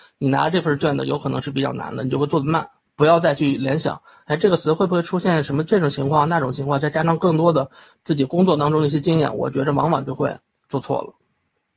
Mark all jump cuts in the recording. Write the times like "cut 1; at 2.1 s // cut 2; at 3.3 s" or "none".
cut 1; at 2.9 s